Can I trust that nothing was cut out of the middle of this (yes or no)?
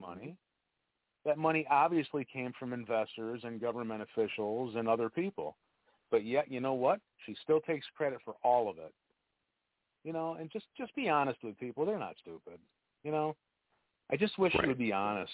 yes